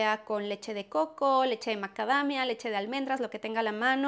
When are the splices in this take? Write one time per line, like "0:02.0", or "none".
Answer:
none